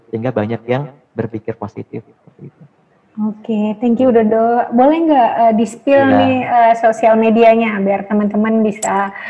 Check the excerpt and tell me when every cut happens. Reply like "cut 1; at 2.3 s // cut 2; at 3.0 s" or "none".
none